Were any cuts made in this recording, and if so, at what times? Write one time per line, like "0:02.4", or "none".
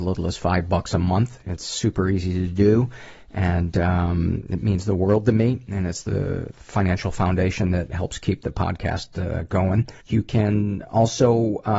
0:10.0